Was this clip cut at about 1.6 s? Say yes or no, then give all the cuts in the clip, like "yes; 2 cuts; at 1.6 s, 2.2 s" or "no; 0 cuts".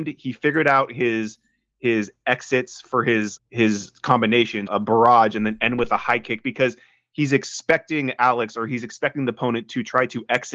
no; 2 cuts; at 3.4 s, 4.7 s